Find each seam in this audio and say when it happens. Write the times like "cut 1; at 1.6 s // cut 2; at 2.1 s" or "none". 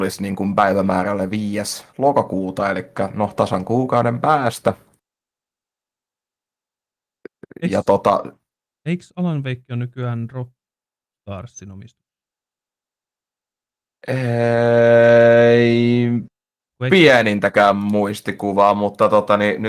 none